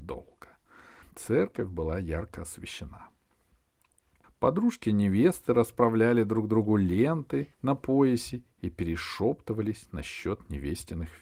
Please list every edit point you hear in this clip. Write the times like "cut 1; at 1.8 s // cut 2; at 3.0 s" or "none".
cut 1; at 1.0 s // cut 2; at 4.2 s // cut 3; at 7.5 s